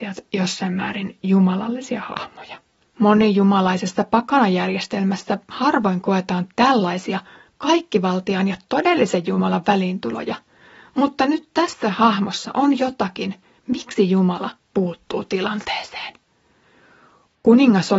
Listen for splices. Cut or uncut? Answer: cut